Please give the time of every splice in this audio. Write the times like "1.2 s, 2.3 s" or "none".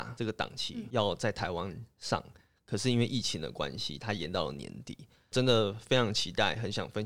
none